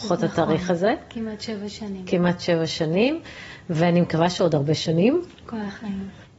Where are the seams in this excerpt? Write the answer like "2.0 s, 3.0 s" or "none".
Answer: none